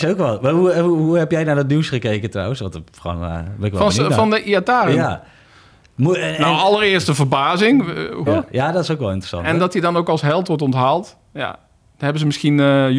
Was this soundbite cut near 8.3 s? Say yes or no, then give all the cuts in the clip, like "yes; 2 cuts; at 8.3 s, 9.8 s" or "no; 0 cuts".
yes; 1 cut; at 8.3 s